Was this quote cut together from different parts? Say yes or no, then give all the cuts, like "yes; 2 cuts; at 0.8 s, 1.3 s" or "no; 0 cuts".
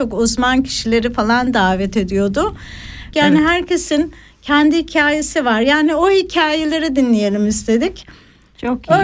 yes; 1 cut; at 3.1 s